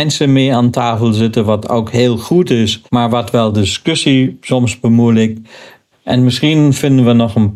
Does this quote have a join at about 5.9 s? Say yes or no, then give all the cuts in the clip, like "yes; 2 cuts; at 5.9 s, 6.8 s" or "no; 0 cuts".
yes; 2 cuts; at 2.9 s, 5.9 s